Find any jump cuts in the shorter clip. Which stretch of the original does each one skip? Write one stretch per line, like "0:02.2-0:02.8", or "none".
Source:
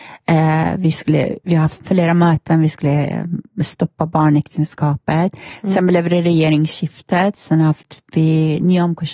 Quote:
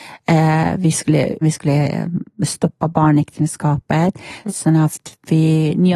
0:01.4-0:02.6
0:05.7-0:07.3